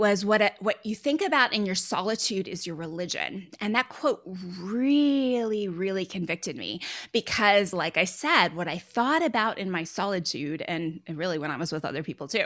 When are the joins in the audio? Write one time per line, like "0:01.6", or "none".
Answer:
none